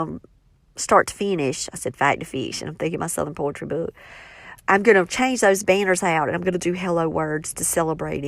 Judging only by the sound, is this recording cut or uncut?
uncut